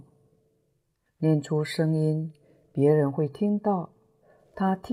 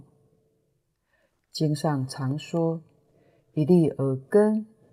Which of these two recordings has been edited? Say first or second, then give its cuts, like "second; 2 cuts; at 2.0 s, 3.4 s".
first; 1 cut; at 1.1 s